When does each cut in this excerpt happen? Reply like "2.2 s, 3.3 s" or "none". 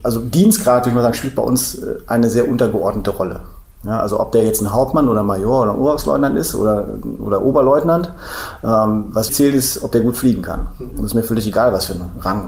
9.3 s